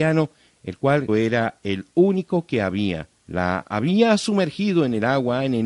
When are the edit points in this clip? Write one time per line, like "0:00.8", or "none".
0:01.1
0:03.2